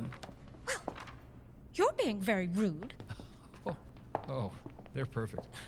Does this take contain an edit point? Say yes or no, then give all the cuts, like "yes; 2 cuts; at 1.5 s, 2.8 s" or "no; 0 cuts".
no; 0 cuts